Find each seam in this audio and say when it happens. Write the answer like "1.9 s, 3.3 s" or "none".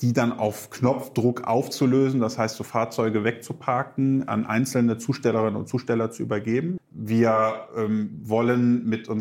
6.8 s